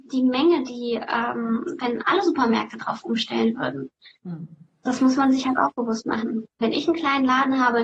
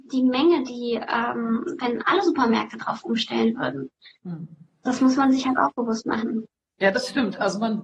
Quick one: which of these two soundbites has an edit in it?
first; 1 cut; at 6.6 s

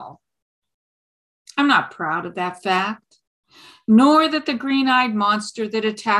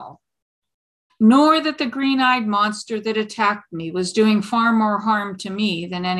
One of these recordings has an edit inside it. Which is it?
second; 1 cut; at 1.1 s

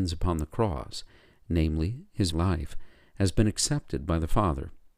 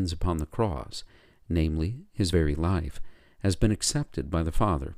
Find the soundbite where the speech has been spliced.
first; 1 cut; at 2.3 s

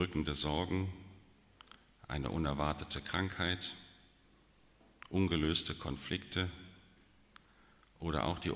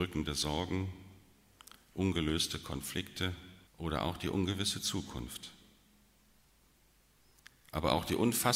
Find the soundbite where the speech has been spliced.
second; 2 cuts; at 1.9 s, 3.7 s

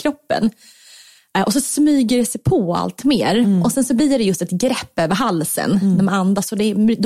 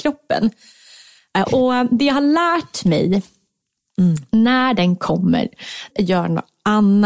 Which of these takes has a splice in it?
second; 2 cuts; at 1.5 s, 5.9 s

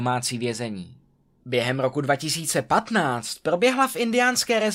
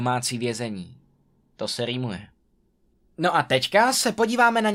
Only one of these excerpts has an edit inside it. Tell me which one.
first; 1 cut; at 1.4 s

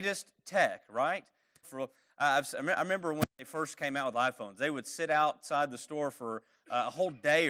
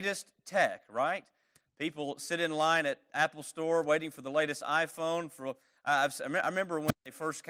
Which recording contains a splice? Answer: first; 1 cut; at 1.6 s

